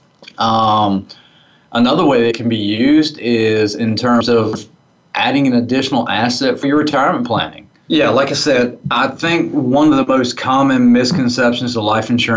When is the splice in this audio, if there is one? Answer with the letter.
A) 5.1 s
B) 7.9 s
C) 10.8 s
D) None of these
B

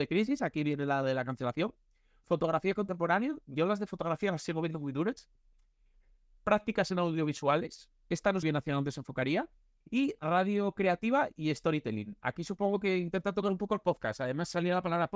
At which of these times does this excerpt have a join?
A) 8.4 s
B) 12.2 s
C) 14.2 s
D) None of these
A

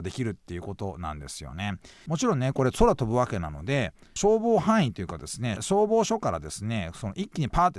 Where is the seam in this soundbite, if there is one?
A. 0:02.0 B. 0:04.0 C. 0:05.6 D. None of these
A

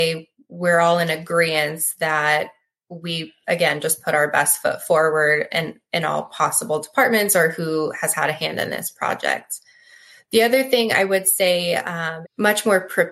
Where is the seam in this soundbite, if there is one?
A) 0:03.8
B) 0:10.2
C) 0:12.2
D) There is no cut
C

